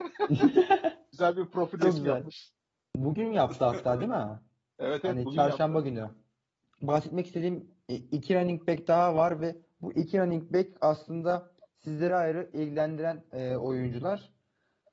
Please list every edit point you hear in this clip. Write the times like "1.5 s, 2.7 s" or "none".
12.1 s